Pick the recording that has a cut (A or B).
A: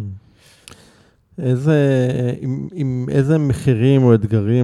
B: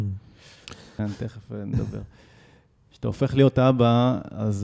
B